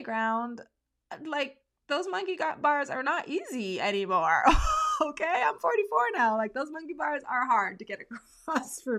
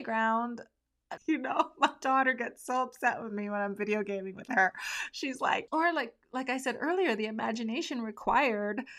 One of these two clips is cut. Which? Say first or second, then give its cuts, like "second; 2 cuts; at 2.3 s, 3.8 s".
second; 2 cuts; at 1.2 s, 5.7 s